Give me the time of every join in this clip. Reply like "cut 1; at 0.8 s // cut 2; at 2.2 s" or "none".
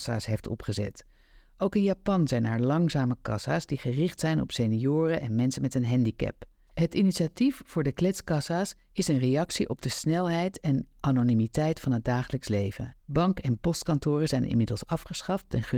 cut 1; at 6.7 s // cut 2; at 13.0 s